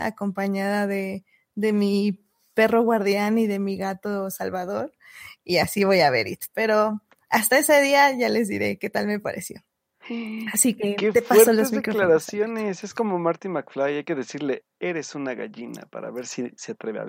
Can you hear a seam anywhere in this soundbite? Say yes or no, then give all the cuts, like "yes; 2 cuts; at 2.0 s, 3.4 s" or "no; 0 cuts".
no; 0 cuts